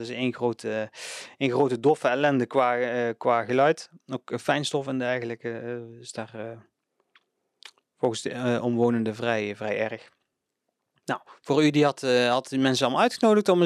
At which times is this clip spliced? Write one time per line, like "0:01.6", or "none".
none